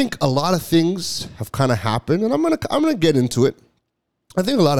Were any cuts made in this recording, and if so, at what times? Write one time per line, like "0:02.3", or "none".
none